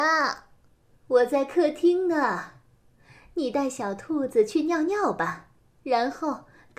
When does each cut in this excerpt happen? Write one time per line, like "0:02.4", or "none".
0:01.0